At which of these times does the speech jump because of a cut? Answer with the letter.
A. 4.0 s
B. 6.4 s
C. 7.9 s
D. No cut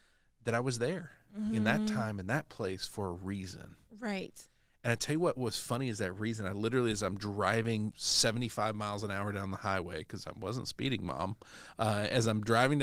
C